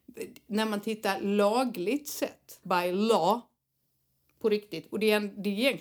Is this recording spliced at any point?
yes; 1 cut; at 2.6 s

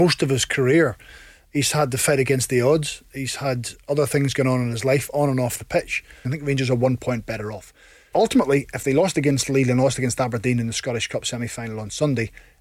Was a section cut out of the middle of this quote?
yes; 2 cuts; at 6.2 s, 8.1 s

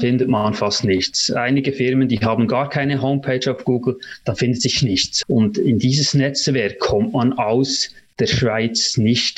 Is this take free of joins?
no; 1 cut; at 5.2 s

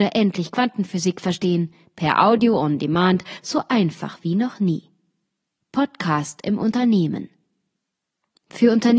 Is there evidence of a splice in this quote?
no; 0 cuts

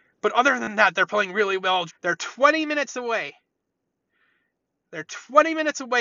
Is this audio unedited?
no; 1 cut; at 1.9 s

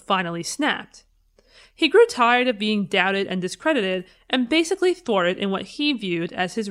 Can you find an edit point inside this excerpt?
no; 0 cuts

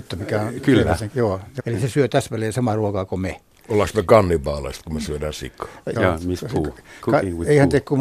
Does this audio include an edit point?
yes; 2 cuts; at 1.6 s, 6.0 s

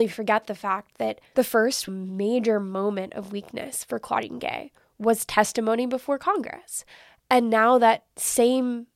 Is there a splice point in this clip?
no; 0 cuts

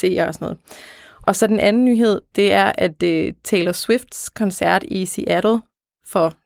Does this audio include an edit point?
yes; 1 cut; at 1.2 s

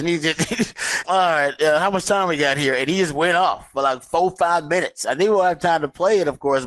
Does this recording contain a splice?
yes; 1 cut; at 1.0 s

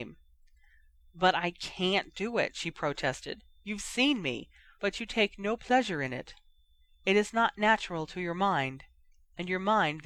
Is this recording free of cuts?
no; 1 cut; at 4.8 s

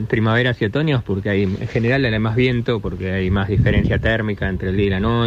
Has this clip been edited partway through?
no; 0 cuts

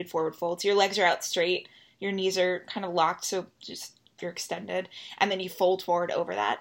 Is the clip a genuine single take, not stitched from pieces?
yes; 0 cuts

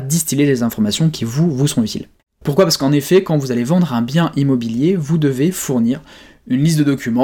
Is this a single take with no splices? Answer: no; 1 cut; at 2.4 s

